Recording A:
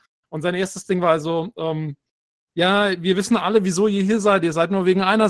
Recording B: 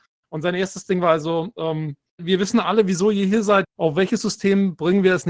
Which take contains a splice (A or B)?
B